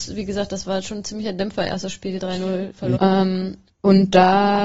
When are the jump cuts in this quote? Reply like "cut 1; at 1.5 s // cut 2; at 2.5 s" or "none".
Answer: cut 1; at 3.0 s